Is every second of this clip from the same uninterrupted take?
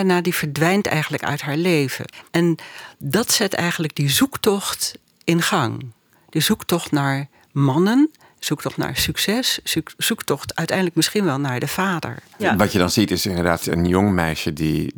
yes; 0 cuts

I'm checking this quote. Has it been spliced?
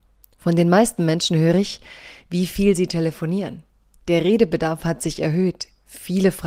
no; 0 cuts

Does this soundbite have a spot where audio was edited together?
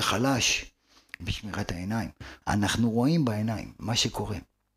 yes; 1 cut; at 2.4 s

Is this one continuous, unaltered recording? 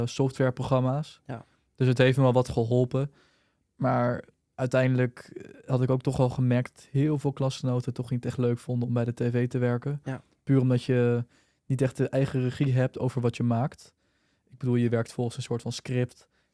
yes; 0 cuts

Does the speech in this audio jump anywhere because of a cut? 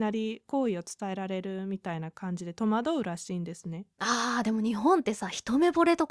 no; 0 cuts

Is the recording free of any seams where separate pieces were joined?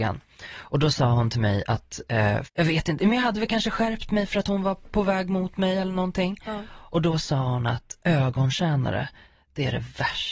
no; 1 cut; at 2.4 s

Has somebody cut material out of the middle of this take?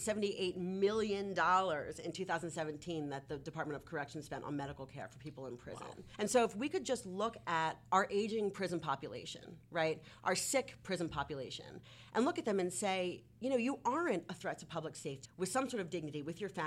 yes; 1 cut; at 15.3 s

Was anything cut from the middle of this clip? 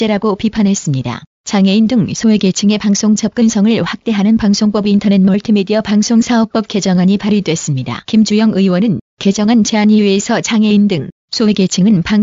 yes; 2 cuts; at 1.3 s, 8.0 s

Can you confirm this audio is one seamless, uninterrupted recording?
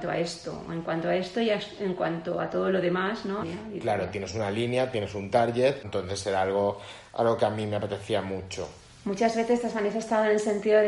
no; 2 cuts; at 3.4 s, 5.8 s

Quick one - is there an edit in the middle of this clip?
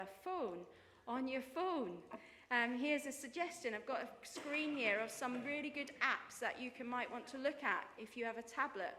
no; 0 cuts

